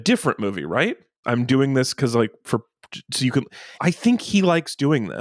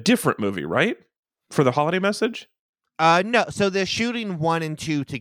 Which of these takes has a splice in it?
first; 2 cuts; at 1.2 s, 3.8 s

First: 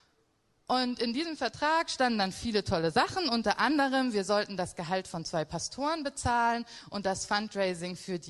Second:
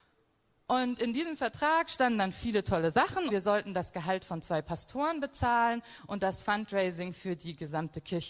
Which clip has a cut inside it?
second; 1 cut; at 3.3 s

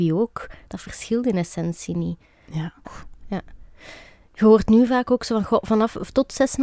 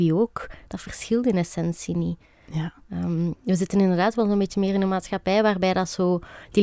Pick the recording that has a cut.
first; 1 cut; at 2.8 s

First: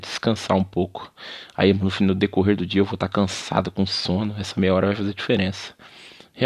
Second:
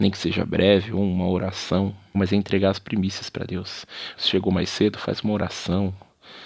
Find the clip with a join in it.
second; 2 cuts; at 2.1 s, 4.2 s

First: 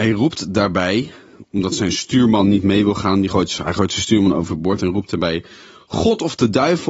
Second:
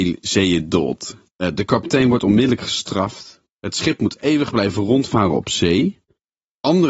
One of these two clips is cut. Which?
second; 1 cut; at 1.3 s

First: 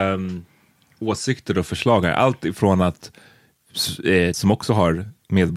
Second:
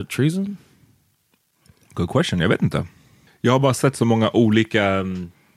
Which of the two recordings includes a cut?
first; 1 cut; at 4.3 s

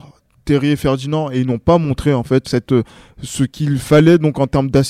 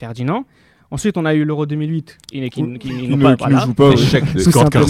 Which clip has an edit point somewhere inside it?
first; 1 cut; at 2.4 s

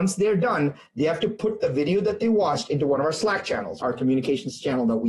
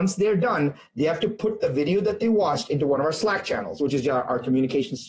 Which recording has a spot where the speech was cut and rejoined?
first; 1 cut; at 3.8 s

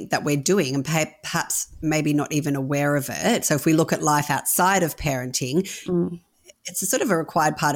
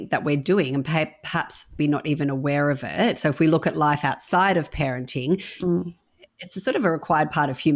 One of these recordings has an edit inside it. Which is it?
second; 1 cut; at 1.8 s

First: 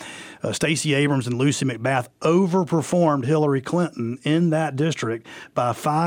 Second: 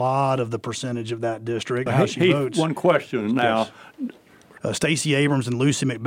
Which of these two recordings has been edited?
second; 2 cuts; at 1.9 s, 4.6 s

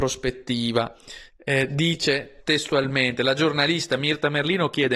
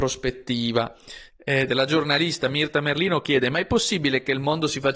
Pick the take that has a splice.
second; 1 cut; at 1.7 s

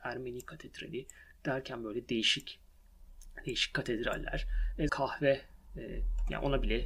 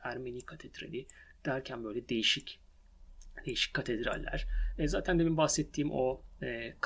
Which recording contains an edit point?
first; 1 cut; at 4.9 s

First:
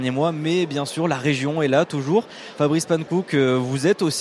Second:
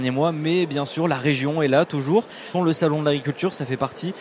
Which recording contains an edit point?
second; 1 cut; at 2.5 s

